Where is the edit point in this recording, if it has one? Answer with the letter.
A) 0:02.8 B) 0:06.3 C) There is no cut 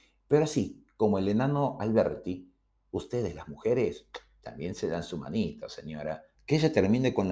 B